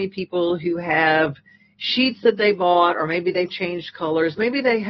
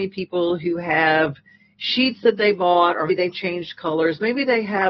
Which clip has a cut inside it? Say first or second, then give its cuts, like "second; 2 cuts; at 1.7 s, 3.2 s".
second; 1 cut; at 3.1 s